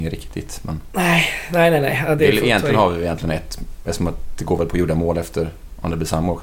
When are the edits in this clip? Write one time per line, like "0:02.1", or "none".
none